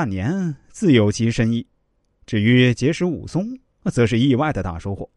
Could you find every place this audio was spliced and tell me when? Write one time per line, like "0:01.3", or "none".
none

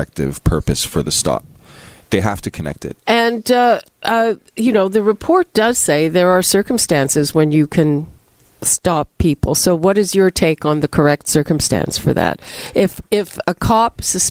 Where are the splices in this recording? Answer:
0:03.0

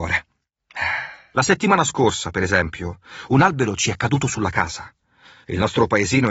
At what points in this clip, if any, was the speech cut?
0:01.3

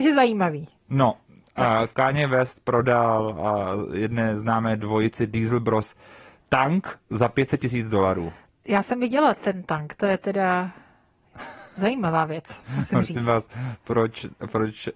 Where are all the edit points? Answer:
0:01.9

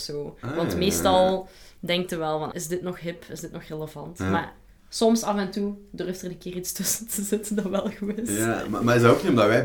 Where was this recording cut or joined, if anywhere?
0:02.5

